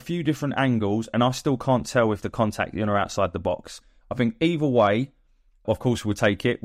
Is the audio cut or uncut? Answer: cut